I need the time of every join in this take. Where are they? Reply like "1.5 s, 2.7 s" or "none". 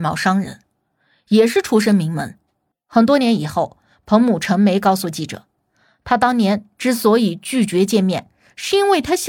2.7 s